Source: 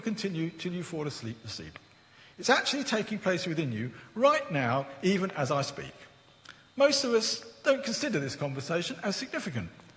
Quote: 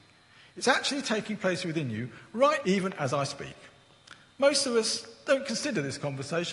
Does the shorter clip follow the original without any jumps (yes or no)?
no